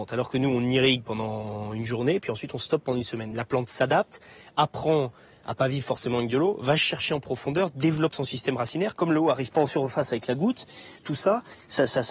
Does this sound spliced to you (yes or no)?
no